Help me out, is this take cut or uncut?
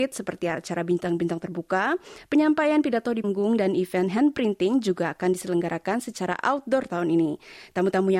cut